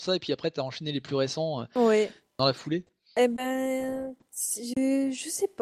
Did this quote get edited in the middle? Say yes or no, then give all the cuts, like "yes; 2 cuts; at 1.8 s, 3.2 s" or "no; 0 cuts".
no; 0 cuts